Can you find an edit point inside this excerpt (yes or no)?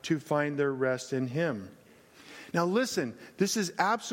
no